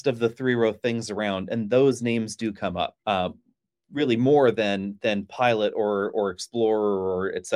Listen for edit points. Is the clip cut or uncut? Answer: cut